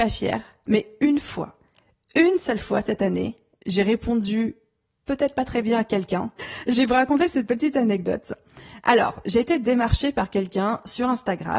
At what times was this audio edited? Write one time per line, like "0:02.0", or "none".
0:06.4